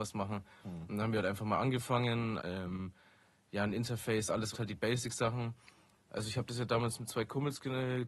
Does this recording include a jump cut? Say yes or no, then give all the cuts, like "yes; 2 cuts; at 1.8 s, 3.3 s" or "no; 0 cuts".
yes; 3 cuts; at 2.4 s, 4.5 s, 6.0 s